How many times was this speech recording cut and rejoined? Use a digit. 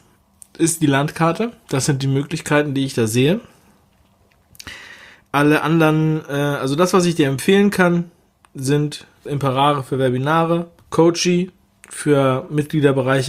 2